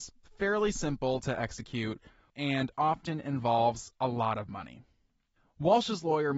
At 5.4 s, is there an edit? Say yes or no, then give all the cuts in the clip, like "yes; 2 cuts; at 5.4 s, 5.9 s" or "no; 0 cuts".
no; 1 cut; at 2.3 s